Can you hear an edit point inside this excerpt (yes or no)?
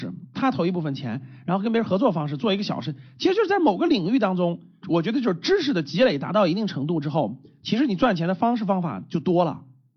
no